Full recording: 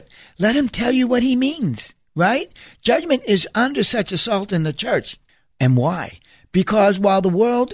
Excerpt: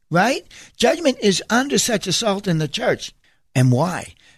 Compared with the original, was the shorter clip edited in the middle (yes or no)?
no